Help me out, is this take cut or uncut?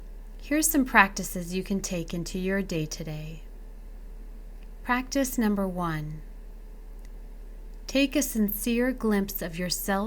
uncut